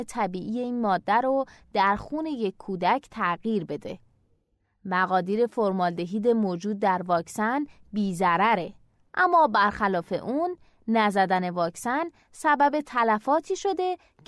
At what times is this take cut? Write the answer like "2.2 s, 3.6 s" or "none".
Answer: none